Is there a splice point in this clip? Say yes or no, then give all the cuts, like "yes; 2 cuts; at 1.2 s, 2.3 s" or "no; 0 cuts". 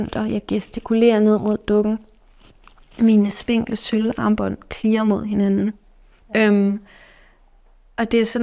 yes; 1 cut; at 6.2 s